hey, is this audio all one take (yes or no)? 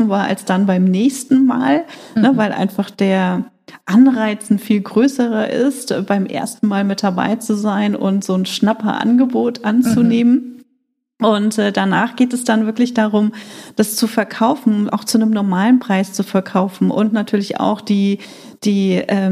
yes